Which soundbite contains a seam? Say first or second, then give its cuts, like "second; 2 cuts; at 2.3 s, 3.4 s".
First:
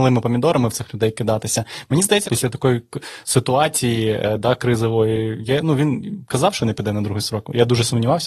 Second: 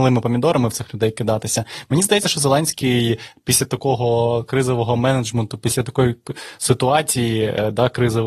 first; 1 cut; at 2.2 s